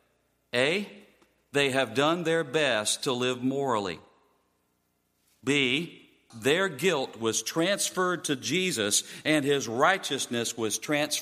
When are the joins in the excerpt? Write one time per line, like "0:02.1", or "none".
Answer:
0:06.3

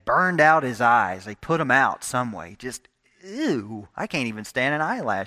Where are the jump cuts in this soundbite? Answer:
none

